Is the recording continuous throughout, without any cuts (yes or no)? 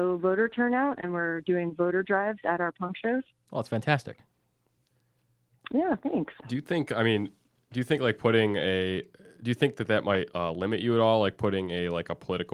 yes